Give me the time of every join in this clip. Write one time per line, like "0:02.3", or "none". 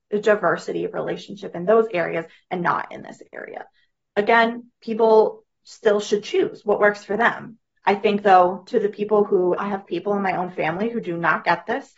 0:09.6